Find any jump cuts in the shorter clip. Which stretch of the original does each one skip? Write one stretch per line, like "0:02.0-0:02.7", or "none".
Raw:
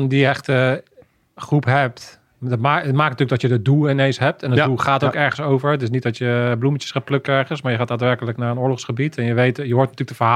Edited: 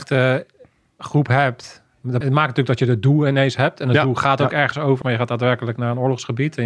0:02.6-0:02.8
0:05.6-0:07.6